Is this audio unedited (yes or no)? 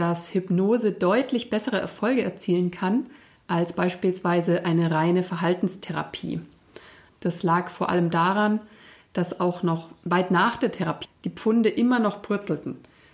no